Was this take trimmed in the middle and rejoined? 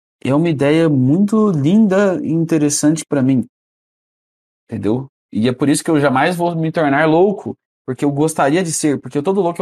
no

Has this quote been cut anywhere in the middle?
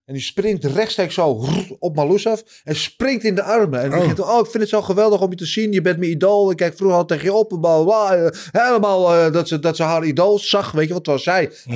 no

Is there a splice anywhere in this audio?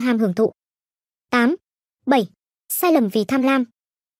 yes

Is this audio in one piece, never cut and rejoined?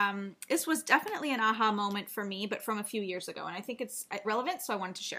no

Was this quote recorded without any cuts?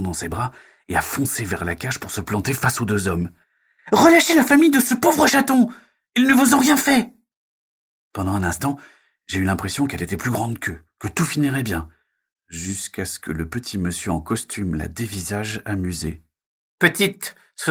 yes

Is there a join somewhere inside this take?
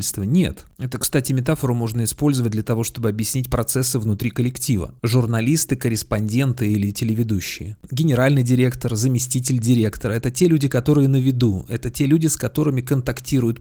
yes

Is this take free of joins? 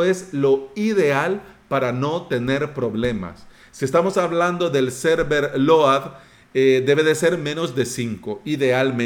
yes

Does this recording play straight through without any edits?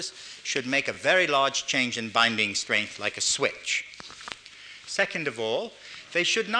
yes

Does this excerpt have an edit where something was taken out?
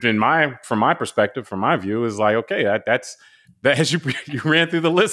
no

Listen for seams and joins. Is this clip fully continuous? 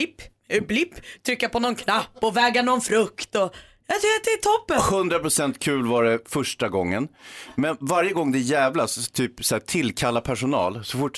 yes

